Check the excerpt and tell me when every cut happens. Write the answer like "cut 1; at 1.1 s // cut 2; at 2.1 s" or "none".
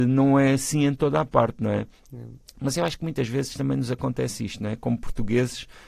none